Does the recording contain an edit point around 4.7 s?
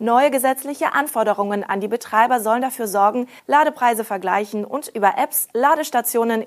no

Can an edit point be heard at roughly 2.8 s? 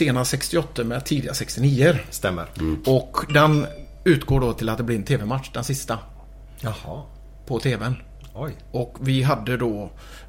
yes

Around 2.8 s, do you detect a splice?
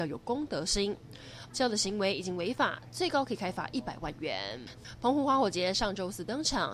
no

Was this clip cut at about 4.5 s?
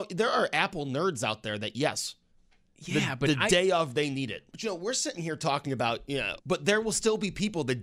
yes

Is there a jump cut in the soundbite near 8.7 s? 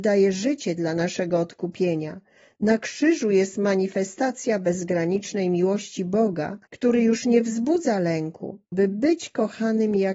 yes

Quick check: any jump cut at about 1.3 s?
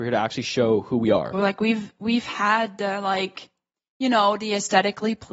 yes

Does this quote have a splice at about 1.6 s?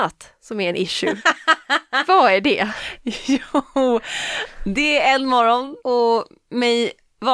no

